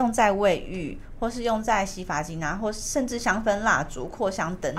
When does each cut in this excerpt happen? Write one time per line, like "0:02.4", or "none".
none